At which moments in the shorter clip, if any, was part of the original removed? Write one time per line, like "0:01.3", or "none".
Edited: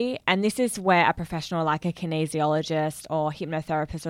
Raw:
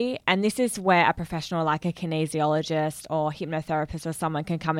none